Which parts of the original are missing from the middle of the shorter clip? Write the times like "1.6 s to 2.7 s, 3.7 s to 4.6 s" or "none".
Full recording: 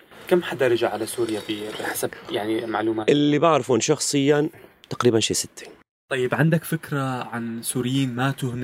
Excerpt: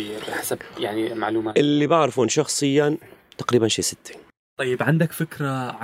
none

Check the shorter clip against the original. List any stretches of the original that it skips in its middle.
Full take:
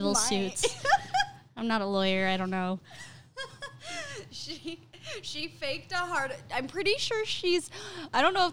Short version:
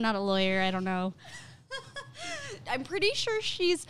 4.3 s to 6.4 s

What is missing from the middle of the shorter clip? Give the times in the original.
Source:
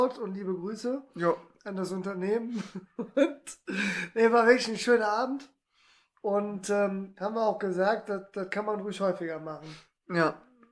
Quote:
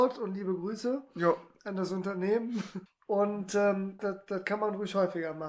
2.9 s to 6.0 s, 7.1 s to 8.0 s

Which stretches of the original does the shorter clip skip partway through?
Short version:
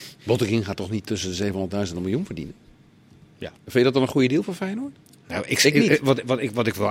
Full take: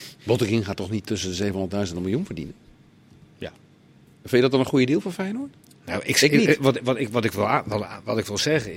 3.6 s to 4.1 s

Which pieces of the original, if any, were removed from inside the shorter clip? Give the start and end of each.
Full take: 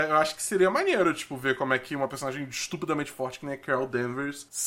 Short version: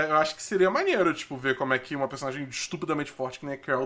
none

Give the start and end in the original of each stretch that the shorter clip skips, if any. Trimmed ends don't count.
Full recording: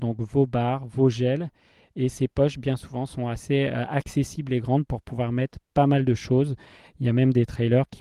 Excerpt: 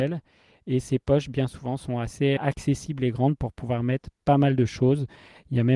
3.7 s to 3.9 s

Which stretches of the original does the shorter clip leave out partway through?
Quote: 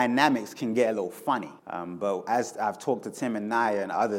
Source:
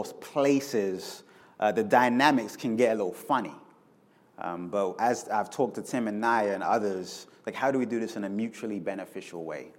3.6 s to 4.3 s

